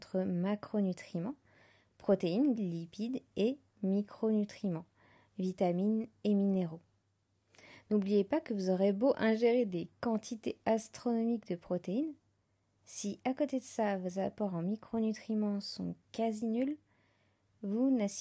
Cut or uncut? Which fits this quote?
cut